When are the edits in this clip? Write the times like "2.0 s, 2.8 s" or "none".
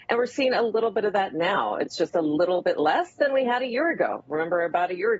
none